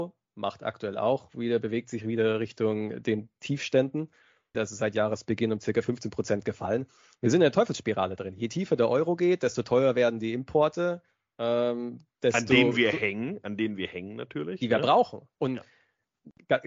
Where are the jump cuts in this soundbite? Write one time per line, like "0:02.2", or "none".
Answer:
0:04.5